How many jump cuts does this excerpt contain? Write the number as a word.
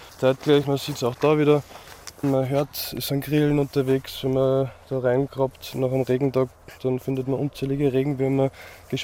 one